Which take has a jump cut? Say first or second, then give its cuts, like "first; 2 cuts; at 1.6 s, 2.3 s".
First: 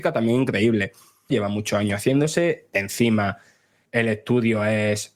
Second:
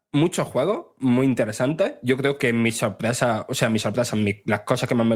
first; 1 cut; at 1.3 s